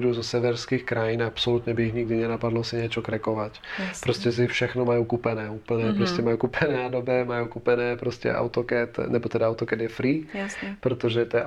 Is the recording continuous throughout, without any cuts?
yes; 0 cuts

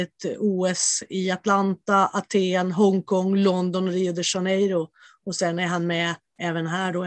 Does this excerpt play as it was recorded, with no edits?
yes; 0 cuts

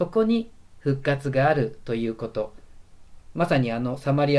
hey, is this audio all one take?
yes; 0 cuts

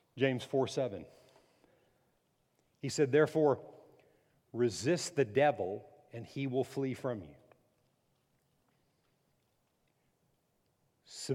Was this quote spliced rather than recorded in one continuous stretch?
yes; 1 cut; at 4.3 s

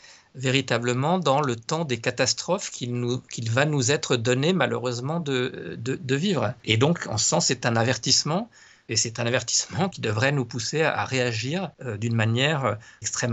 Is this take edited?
no; 0 cuts

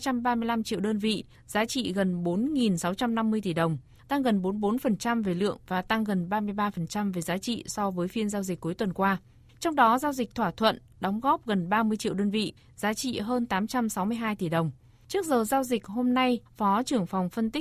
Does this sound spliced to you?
yes; 1 cut; at 16.5 s

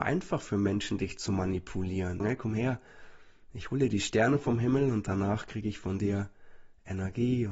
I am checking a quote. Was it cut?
yes; 1 cut; at 2.2 s

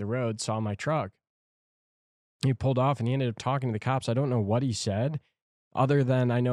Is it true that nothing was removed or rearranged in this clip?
yes; 0 cuts

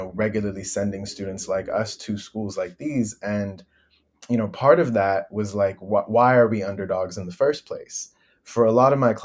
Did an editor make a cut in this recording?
no; 0 cuts

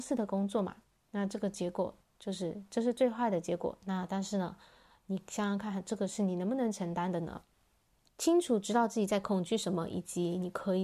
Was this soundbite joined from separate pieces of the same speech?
yes; 1 cut; at 8.1 s

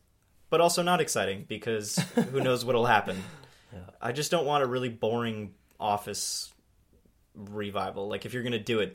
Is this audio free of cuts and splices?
yes; 0 cuts

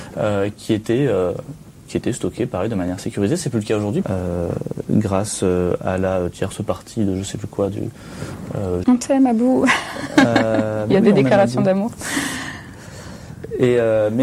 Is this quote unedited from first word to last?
no; 2 cuts; at 4.0 s, 8.8 s

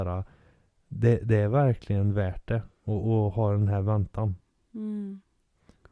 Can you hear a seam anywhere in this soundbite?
no; 0 cuts

